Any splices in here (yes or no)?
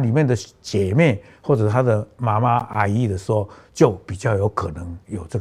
no